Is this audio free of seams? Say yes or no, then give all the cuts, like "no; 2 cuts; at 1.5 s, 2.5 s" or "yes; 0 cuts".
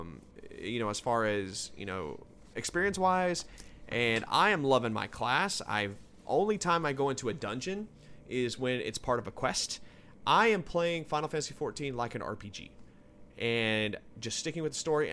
yes; 0 cuts